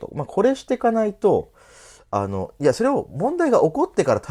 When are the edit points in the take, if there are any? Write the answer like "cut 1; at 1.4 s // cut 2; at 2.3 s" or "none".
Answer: none